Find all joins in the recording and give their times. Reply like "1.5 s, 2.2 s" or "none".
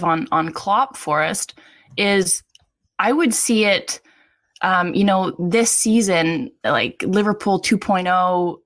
none